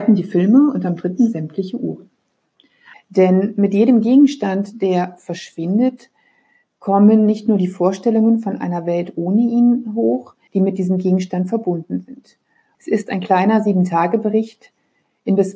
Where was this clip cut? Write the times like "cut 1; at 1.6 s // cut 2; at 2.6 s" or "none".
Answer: cut 1; at 2.9 s // cut 2; at 10.5 s // cut 3; at 12.7 s